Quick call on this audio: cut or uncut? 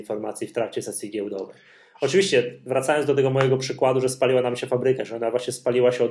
uncut